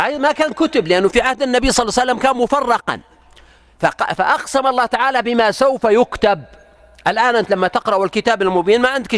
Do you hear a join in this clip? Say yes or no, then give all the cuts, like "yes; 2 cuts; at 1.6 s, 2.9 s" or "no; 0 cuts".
no; 0 cuts